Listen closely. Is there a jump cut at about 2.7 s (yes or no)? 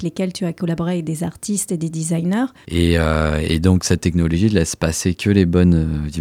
yes